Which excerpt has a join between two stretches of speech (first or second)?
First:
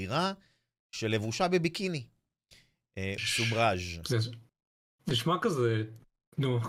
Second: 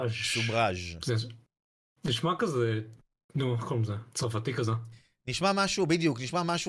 first